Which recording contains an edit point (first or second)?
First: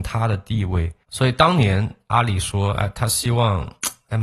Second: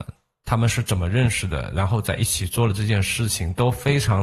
first